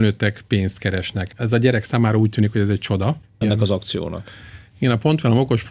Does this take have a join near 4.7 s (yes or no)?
no